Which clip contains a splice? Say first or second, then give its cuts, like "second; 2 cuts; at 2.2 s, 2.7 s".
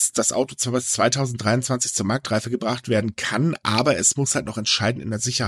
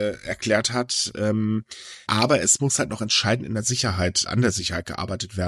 second; 2 cuts; at 2.0 s, 4.3 s